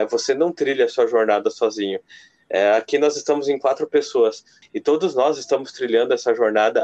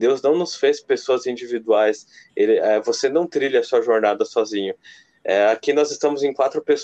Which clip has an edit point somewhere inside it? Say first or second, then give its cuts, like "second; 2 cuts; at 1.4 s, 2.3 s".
first; 1 cut; at 4.6 s